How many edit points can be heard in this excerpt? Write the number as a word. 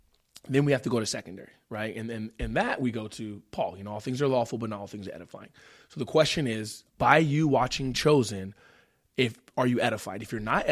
one